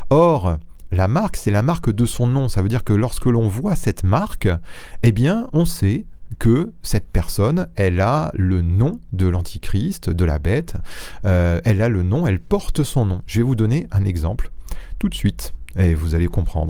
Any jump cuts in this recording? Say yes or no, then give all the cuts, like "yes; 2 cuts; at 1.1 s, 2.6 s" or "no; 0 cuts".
no; 0 cuts